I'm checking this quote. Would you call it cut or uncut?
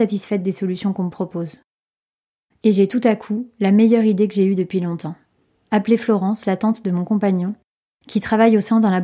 uncut